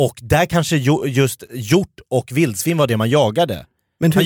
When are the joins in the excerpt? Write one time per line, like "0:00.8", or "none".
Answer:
none